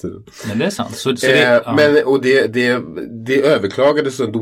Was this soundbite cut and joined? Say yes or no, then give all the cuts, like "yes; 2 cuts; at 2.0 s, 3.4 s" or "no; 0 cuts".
no; 0 cuts